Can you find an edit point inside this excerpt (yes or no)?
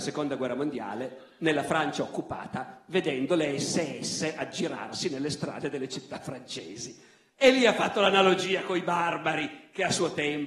no